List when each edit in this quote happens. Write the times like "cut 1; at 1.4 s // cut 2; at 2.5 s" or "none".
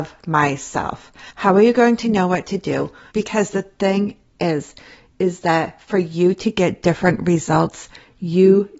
cut 1; at 1.3 s // cut 2; at 3.1 s